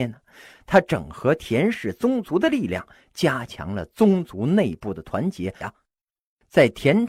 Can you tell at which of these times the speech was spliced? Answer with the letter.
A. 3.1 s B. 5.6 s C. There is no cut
B